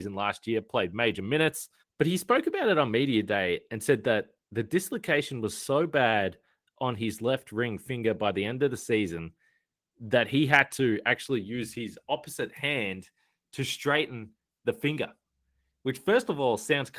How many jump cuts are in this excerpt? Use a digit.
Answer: 1